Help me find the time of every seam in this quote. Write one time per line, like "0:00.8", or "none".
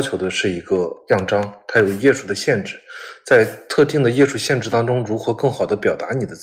none